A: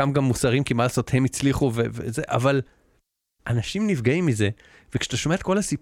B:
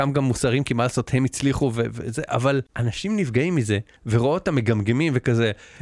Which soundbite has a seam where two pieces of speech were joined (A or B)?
B